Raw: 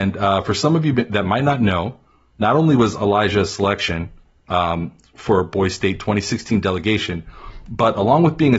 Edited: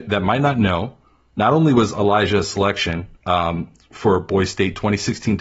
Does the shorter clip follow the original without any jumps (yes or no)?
no